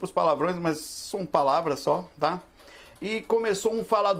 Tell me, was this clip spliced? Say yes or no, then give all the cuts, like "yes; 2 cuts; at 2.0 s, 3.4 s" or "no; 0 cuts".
no; 0 cuts